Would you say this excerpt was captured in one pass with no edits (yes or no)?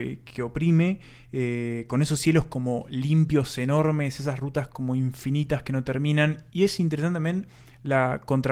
yes